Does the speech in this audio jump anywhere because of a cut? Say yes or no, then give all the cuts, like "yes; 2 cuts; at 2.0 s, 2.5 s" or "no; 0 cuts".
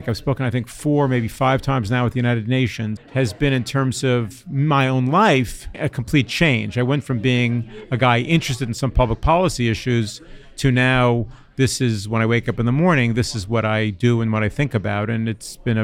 yes; 1 cut; at 3.0 s